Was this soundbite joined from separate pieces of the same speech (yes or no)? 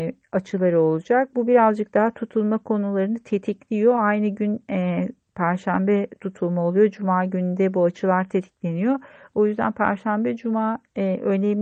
no